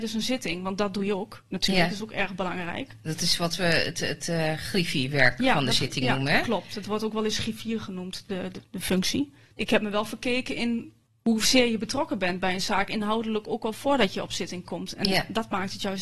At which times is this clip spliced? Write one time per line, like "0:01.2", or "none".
none